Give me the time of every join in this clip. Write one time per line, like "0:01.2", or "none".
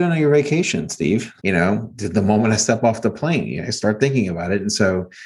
0:01.4